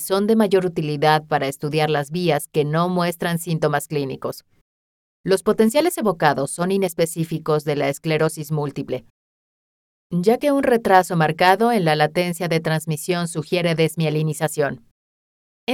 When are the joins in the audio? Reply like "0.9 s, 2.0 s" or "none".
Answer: none